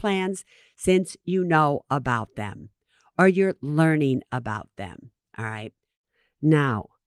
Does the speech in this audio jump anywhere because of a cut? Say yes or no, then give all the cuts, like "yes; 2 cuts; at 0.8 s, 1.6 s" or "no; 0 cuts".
no; 0 cuts